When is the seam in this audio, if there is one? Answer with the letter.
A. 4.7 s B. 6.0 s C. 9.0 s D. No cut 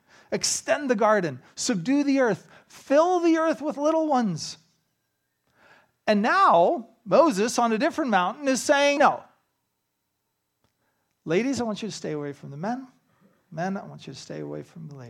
C